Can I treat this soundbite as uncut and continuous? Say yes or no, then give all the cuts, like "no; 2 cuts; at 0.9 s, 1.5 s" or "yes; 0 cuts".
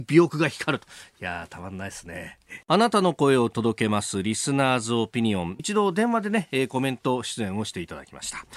no; 2 cuts; at 2.6 s, 5.6 s